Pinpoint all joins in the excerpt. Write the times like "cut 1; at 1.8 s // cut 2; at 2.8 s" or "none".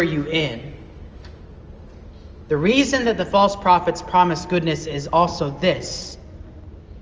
none